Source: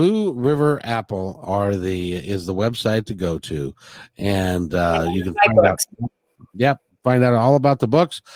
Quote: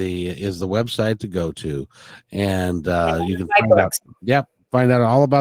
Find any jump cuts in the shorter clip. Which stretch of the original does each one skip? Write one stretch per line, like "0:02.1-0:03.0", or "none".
0:05.9-0:06.4